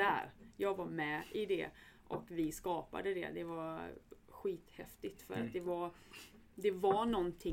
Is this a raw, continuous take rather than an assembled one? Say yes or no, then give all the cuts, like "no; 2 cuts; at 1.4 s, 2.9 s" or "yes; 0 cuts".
yes; 0 cuts